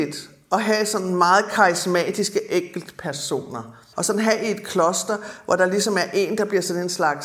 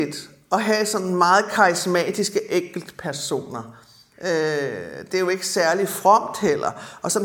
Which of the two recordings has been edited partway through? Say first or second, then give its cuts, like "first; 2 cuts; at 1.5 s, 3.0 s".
first; 1 cut; at 3.9 s